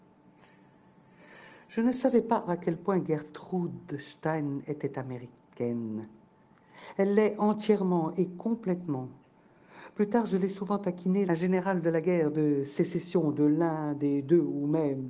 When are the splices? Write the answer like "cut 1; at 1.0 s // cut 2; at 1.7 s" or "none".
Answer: cut 1; at 2.5 s // cut 2; at 11.3 s